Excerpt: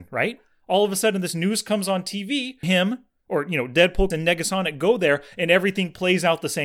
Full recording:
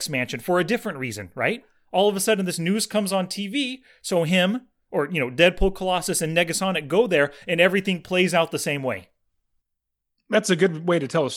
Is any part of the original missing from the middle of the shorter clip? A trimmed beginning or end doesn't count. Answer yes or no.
yes